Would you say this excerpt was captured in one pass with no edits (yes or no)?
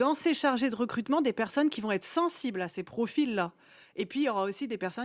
yes